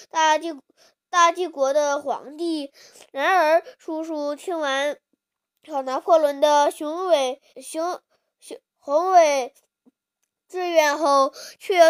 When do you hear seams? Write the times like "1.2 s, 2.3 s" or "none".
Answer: 7.5 s, 8.7 s

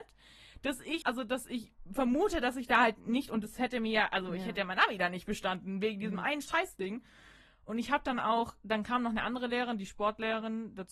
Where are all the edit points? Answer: 1.0 s

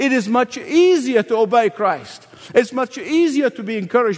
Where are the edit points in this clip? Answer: none

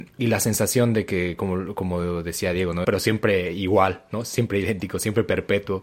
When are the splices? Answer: 2.8 s

